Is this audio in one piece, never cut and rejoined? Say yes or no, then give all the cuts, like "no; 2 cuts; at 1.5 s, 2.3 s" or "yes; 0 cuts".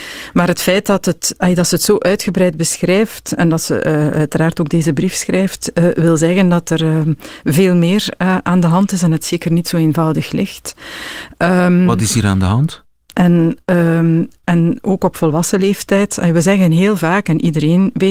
no; 2 cuts; at 13.1 s, 14.4 s